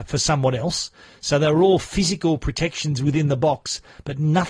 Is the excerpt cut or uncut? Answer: uncut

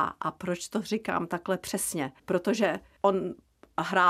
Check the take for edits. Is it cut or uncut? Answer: cut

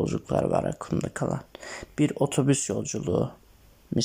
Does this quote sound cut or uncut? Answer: uncut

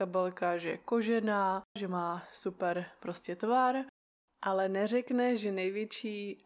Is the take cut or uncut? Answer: cut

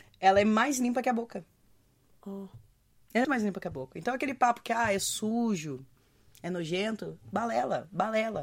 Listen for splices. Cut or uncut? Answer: cut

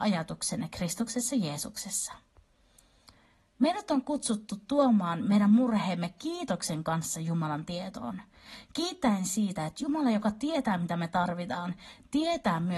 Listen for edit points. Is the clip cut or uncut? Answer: uncut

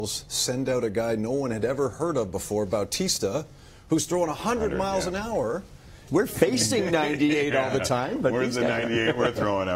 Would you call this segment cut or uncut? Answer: cut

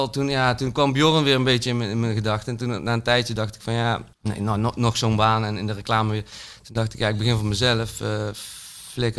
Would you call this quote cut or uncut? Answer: cut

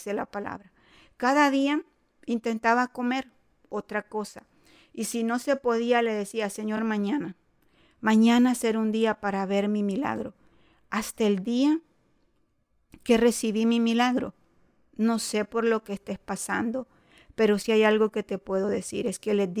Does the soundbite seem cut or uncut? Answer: uncut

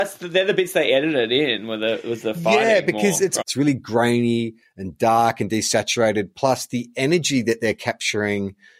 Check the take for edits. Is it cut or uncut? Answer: cut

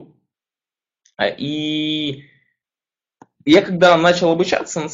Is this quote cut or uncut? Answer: uncut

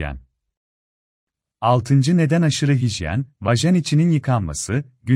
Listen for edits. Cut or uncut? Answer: uncut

